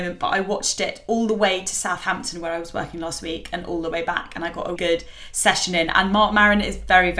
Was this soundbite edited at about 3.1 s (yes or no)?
no